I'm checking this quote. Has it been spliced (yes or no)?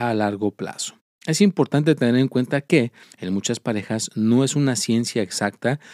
yes